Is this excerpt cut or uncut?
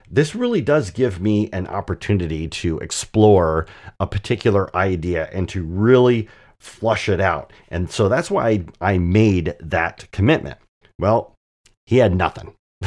cut